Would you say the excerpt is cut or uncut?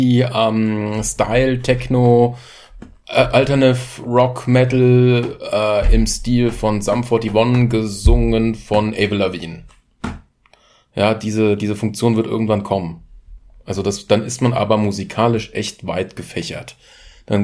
uncut